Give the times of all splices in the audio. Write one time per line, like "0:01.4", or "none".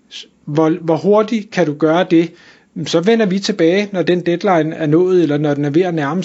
none